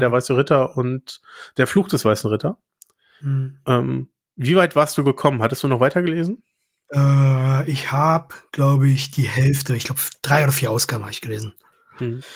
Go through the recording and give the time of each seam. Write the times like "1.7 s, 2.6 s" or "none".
none